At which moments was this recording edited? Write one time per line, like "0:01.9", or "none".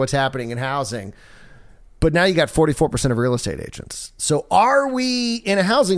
none